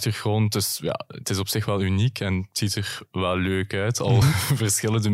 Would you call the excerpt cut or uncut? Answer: uncut